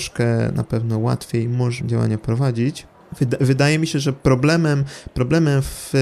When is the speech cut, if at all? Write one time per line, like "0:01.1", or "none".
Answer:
0:01.8